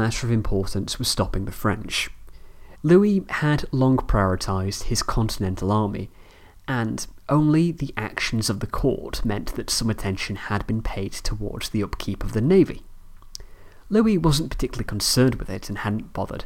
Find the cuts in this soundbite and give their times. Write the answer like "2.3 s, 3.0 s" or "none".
2.8 s

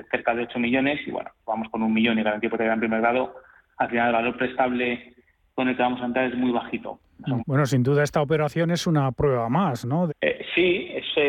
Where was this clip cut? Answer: 7.4 s, 10.1 s

